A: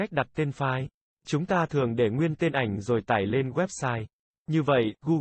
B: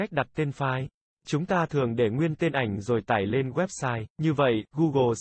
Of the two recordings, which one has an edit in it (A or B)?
B